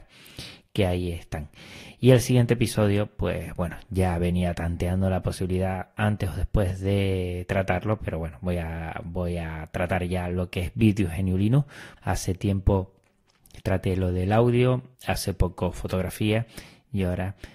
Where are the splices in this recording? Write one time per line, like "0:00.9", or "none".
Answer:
0:12.0
0:14.9